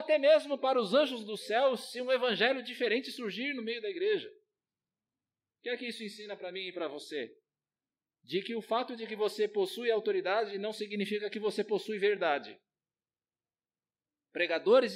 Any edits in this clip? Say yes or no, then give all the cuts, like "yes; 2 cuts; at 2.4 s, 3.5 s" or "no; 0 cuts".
no; 0 cuts